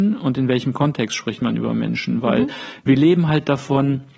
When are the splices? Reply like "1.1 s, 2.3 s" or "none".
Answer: none